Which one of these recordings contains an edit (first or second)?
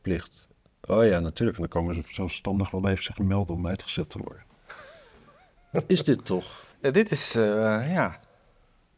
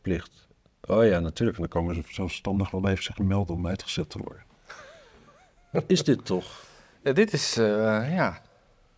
first